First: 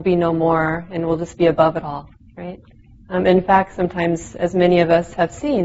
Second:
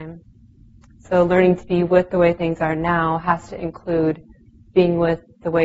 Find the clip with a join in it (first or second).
first